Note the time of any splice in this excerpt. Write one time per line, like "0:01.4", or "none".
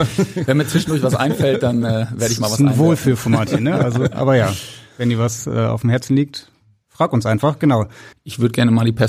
0:08.1

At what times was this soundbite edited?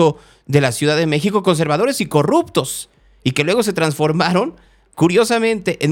none

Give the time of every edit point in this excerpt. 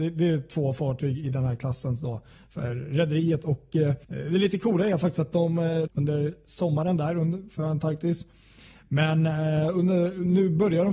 0:04.0
0:05.9

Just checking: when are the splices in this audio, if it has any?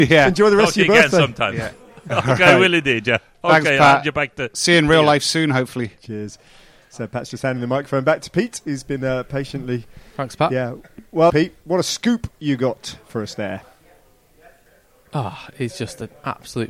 0:11.3

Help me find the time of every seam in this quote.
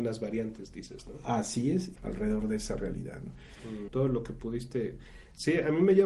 0:02.0
0:03.9

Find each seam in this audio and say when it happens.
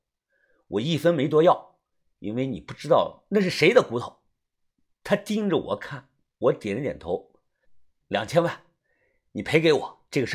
0:06.3
0:08.0

